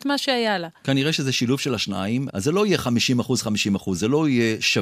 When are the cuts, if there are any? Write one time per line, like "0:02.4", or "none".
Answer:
0:02.3